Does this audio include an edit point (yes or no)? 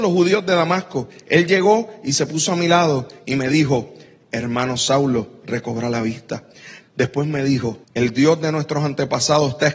yes